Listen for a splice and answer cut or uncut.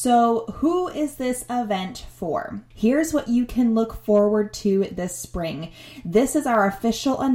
cut